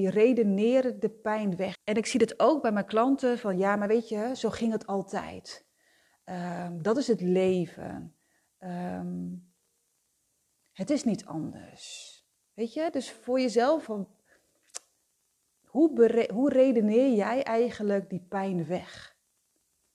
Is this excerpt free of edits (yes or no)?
no